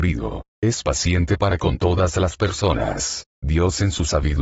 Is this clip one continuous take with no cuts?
no; 1 cut; at 3.3 s

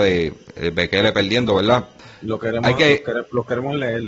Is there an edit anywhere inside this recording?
no; 0 cuts

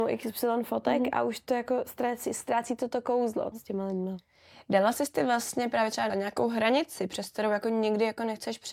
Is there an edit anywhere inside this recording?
yes; 2 cuts; at 3.5 s, 6.1 s

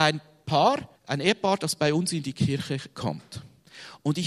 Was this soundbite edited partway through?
yes; 1 cut; at 1.0 s

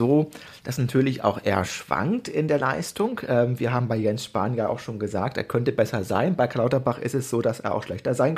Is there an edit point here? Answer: no; 0 cuts

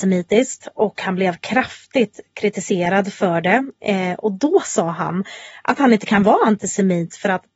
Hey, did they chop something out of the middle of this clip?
no; 0 cuts

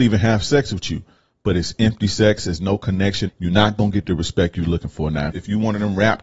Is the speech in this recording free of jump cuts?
no; 2 cuts; at 3.3 s, 5.3 s

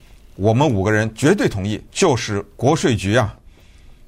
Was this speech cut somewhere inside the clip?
yes; 1 cut; at 1.9 s

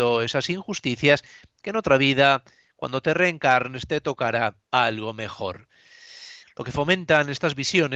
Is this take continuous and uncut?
no; 1 cut; at 6.4 s

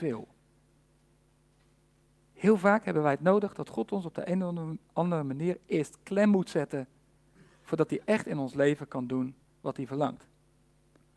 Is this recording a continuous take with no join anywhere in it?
yes; 0 cuts

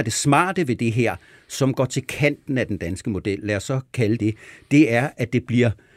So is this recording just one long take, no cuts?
no; 1 cut; at 4.2 s

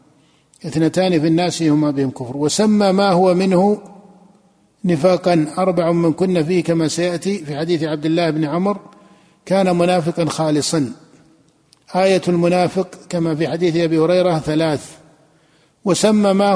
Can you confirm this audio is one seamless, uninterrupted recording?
yes; 0 cuts

